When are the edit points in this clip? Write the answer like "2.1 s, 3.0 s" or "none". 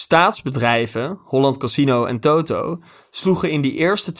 none